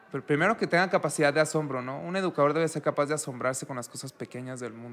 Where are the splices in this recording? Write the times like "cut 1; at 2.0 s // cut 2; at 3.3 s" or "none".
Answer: none